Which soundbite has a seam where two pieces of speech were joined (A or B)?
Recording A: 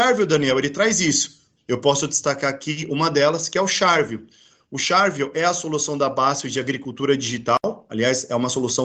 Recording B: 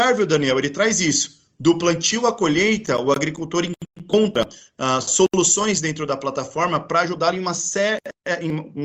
A